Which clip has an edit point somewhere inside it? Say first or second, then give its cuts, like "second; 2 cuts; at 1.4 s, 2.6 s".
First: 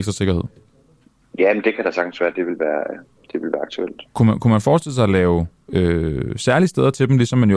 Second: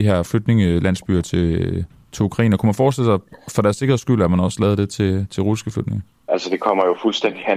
second; 1 cut; at 6.3 s